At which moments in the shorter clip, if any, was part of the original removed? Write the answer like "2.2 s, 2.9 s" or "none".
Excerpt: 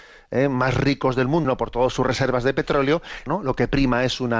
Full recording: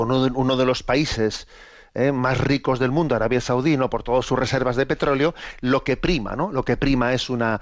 1.4 s, 3.3 s